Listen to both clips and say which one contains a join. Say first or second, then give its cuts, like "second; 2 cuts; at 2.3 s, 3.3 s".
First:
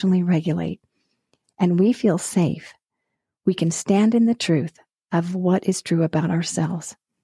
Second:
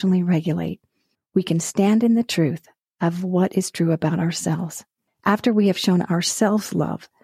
second; 2 cuts; at 1.1 s, 5.1 s